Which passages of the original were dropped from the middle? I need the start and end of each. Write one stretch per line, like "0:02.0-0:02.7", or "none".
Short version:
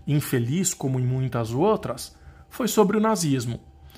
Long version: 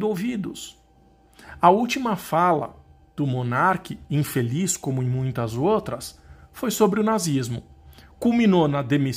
none